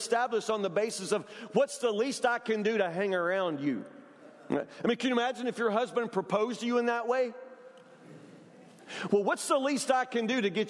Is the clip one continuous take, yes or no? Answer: yes